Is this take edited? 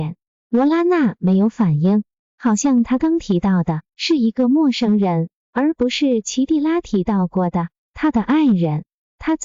yes; 1 cut; at 3.0 s

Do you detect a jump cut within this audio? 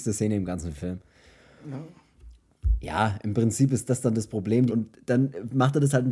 yes; 1 cut; at 4.7 s

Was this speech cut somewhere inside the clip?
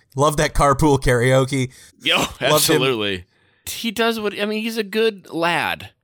yes; 2 cuts; at 1.9 s, 3.6 s

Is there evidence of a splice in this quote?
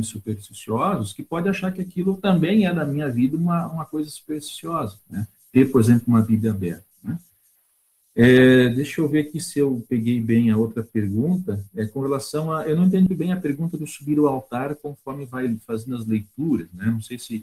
yes; 1 cut; at 13.1 s

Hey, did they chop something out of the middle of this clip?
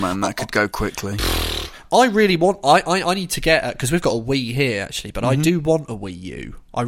no; 0 cuts

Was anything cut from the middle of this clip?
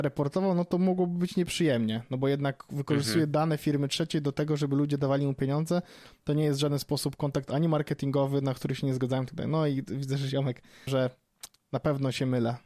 yes; 1 cut; at 10.9 s

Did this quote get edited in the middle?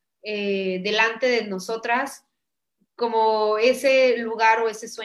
no; 0 cuts

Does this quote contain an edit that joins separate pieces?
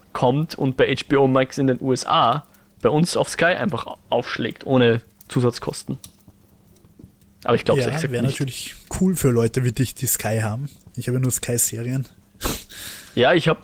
no; 0 cuts

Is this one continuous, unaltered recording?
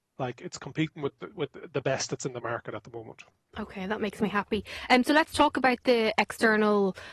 yes; 0 cuts

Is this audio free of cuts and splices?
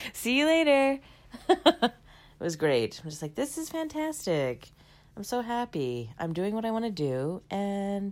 yes; 0 cuts

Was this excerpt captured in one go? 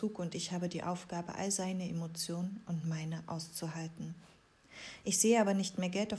yes; 0 cuts

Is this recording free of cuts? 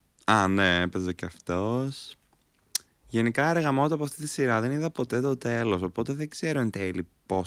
yes; 0 cuts

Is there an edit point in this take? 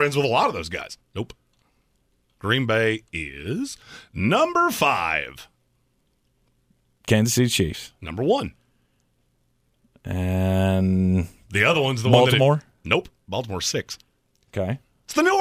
yes; 1 cut; at 1.0 s

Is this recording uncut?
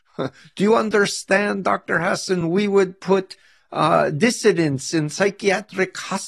yes; 0 cuts

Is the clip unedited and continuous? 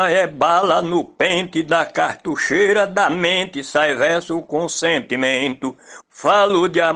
no; 1 cut; at 6.0 s

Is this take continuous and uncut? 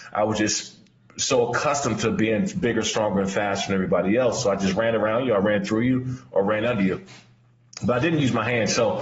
yes; 0 cuts

